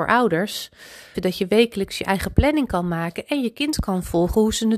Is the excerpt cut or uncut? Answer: cut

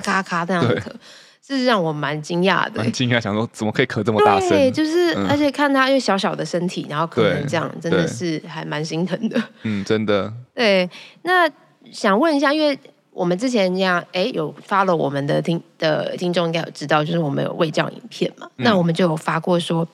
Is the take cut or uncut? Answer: uncut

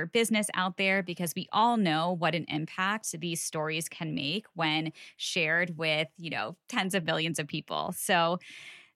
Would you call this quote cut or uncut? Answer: uncut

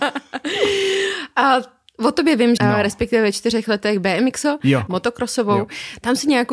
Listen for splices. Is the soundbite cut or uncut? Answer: cut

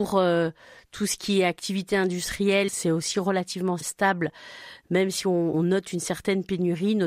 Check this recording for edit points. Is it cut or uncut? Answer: cut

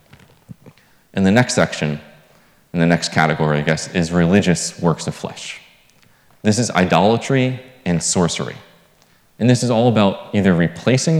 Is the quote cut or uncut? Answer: uncut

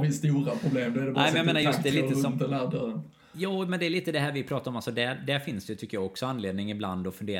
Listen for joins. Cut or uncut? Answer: uncut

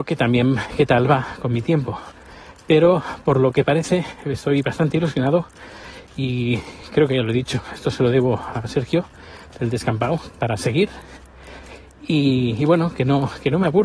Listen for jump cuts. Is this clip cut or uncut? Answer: cut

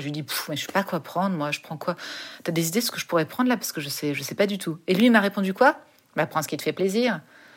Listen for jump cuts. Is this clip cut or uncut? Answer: uncut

